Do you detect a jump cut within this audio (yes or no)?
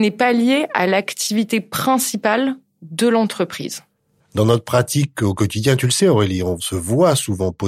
no